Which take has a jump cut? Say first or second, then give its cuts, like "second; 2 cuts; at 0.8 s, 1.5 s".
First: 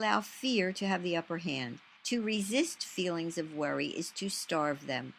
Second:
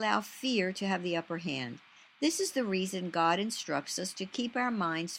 first; 1 cut; at 2.0 s